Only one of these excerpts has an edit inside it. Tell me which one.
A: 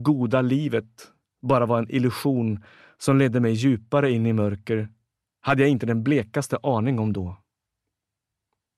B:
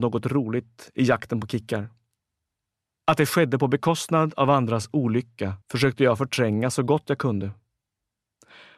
B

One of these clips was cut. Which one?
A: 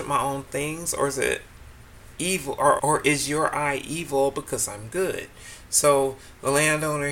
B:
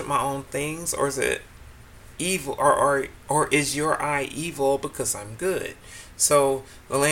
A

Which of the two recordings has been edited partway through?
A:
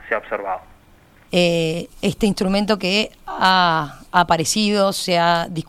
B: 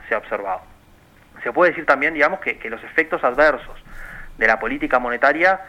A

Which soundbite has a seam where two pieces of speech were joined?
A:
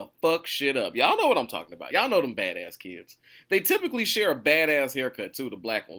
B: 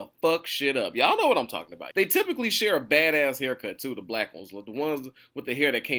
B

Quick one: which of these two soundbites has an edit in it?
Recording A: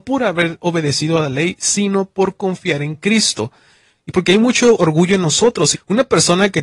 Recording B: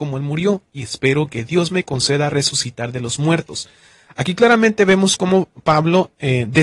A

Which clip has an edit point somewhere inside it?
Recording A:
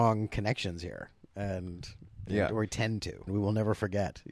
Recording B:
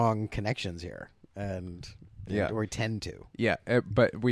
A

